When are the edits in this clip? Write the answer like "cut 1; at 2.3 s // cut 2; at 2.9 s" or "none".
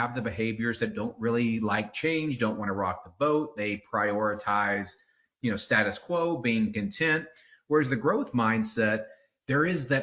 none